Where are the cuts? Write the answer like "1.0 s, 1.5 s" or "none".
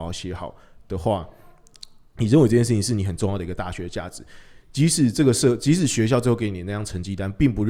none